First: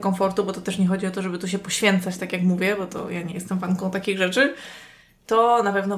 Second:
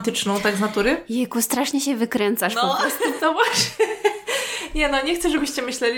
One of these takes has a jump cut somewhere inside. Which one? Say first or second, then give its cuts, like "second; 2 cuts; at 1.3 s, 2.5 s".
second; 1 cut; at 3.2 s